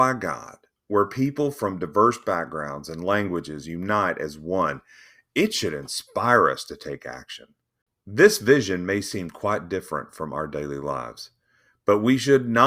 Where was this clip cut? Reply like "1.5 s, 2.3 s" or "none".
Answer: none